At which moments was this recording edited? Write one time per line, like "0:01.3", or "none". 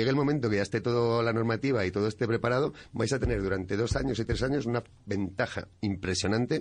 none

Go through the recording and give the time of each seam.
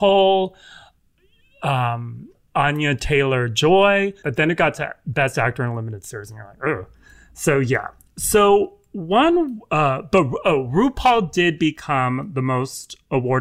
0:04.2

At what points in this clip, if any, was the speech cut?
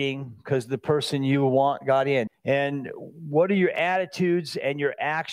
0:02.3

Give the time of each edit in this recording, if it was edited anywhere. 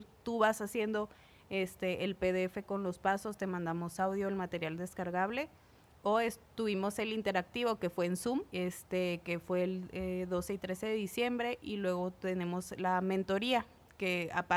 0:08.5

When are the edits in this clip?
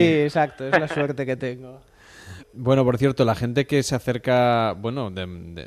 0:02.4

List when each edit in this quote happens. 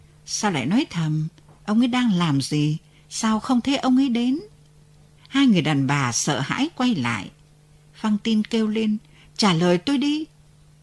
0:05.2

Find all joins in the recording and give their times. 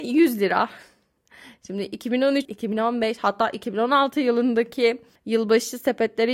0:02.4

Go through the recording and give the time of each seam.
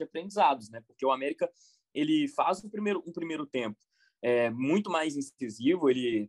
none

